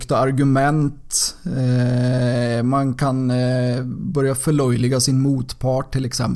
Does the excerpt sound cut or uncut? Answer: uncut